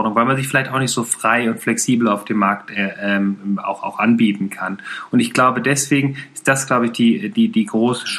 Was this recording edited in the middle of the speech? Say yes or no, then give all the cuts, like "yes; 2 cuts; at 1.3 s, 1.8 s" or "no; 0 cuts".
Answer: no; 0 cuts